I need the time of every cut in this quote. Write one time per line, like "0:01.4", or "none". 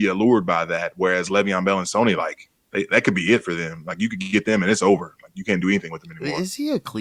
none